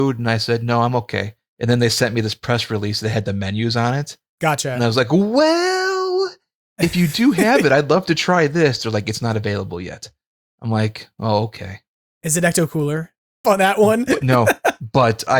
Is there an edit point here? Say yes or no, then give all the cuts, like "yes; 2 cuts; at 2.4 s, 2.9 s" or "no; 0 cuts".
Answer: yes; 1 cut; at 13.4 s